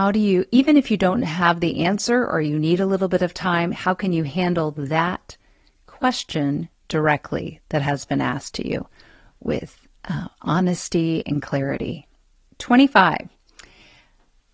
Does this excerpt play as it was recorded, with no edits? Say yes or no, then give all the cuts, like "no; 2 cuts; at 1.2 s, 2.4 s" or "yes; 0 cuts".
yes; 0 cuts